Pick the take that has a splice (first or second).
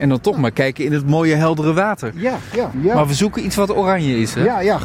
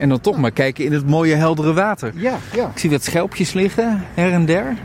first